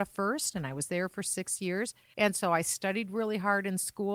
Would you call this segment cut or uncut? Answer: cut